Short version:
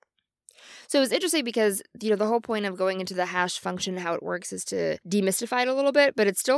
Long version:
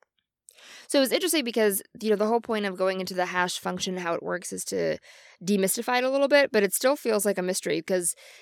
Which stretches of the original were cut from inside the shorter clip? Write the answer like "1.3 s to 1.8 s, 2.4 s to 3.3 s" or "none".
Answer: 5.0 s to 5.4 s